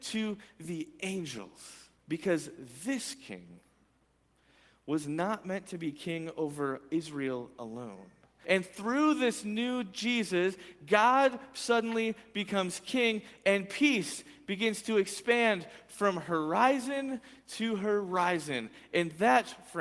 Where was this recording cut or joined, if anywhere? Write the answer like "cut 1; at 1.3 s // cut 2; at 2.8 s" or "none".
cut 1; at 2.0 s // cut 2; at 8.4 s